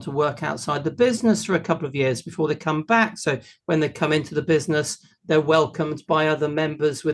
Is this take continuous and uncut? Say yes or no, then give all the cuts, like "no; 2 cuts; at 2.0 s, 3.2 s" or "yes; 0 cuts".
yes; 0 cuts